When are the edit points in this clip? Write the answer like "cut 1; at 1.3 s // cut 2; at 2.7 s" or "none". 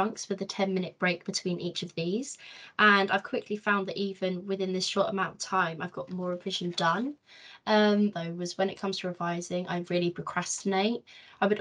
cut 1; at 8.1 s

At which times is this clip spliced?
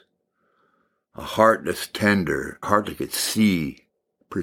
cut 1; at 2.6 s

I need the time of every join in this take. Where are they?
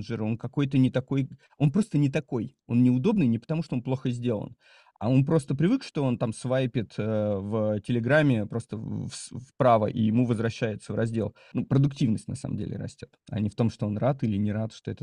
cut 1; at 11.5 s // cut 2; at 13.2 s

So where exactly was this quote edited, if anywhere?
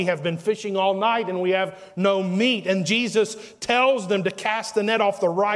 none

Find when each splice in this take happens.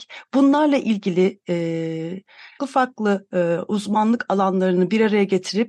cut 1; at 2.6 s

